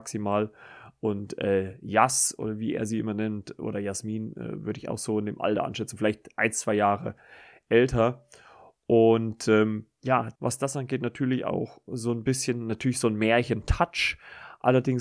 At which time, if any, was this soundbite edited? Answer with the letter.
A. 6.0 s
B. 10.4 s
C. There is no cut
B